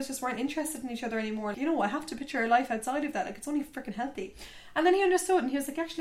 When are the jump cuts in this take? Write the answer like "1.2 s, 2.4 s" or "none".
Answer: 1.5 s